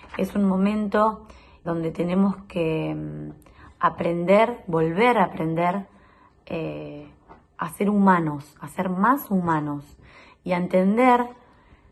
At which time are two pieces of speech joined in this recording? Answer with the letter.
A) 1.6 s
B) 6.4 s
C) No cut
A